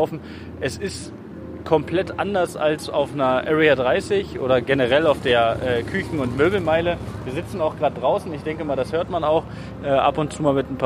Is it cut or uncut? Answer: uncut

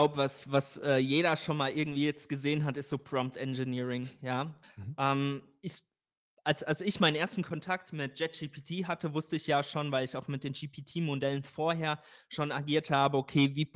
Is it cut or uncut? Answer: cut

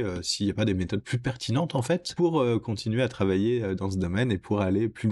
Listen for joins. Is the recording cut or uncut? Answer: uncut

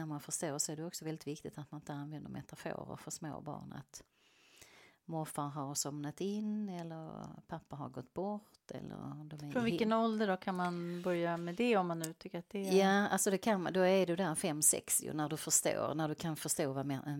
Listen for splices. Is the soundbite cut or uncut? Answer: uncut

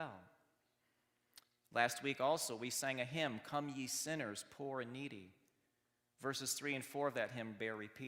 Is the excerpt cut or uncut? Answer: uncut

